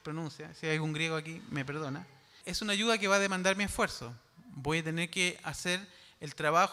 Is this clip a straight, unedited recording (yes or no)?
no